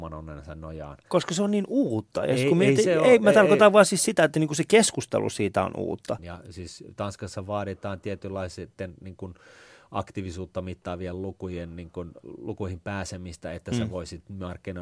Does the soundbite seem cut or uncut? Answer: cut